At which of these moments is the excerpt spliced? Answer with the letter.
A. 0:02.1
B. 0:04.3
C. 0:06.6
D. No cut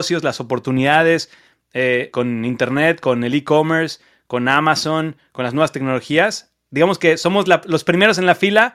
A